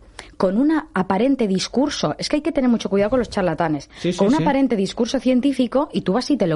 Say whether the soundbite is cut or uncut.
uncut